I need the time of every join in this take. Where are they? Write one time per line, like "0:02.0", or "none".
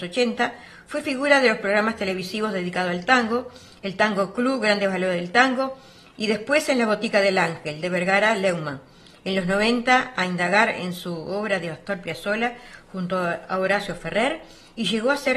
none